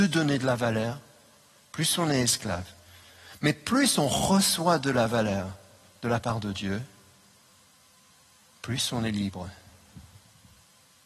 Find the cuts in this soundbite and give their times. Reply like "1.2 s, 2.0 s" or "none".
none